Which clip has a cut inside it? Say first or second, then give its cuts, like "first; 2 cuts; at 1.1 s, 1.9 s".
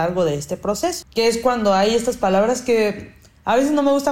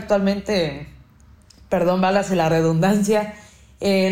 first; 1 cut; at 1.0 s